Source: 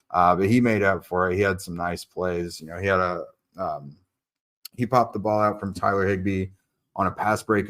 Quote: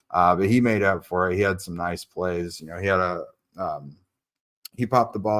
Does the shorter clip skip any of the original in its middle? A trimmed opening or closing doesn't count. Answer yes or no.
no